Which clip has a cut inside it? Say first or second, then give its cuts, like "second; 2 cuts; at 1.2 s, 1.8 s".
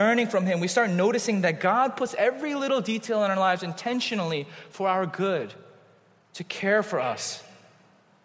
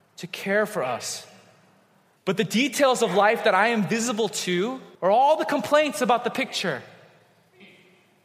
second; 2 cuts; at 2.2 s, 5.0 s